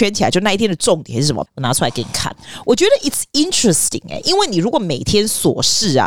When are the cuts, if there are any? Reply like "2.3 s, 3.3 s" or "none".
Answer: 1.5 s